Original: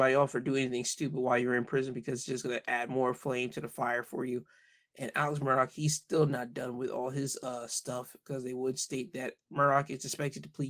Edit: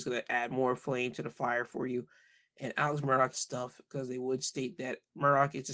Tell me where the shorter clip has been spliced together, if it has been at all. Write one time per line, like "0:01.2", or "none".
0:03.3